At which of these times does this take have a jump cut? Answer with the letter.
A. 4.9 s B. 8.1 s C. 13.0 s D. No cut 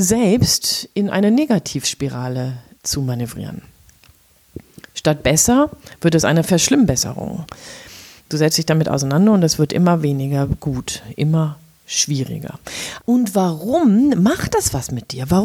C